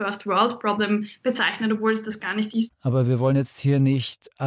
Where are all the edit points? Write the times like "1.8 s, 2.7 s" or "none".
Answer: 2.7 s